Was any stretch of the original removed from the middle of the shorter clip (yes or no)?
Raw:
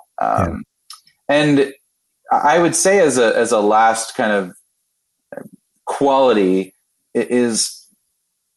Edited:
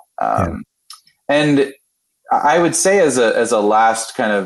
no